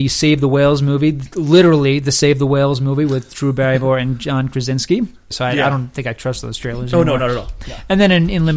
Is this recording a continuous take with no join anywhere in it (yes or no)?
no